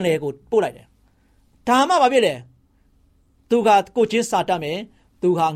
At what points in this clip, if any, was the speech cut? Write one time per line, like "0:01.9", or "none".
none